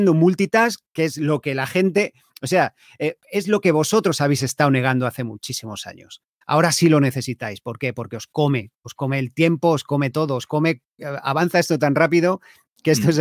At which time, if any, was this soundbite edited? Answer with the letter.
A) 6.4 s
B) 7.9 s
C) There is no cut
C